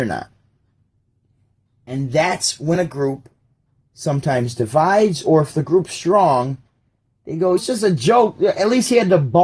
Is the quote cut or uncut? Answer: cut